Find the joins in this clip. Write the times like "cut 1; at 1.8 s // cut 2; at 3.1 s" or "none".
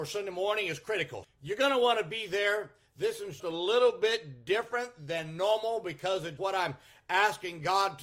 cut 1; at 1.2 s // cut 2; at 3.4 s // cut 3; at 6.4 s